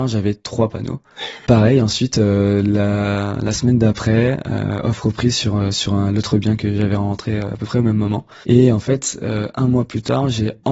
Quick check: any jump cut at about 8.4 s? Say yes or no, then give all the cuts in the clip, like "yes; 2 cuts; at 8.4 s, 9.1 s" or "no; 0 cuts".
yes; 2 cuts; at 1.4 s, 8.4 s